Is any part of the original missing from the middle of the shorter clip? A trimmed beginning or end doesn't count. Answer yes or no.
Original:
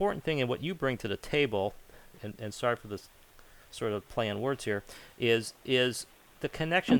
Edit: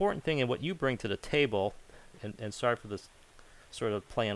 no